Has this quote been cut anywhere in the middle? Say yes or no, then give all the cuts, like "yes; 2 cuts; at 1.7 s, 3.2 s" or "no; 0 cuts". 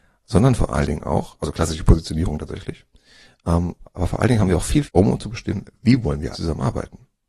yes; 2 cuts; at 4.9 s, 6.3 s